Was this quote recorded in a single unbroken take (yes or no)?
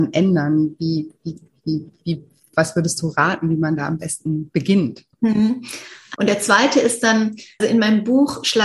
no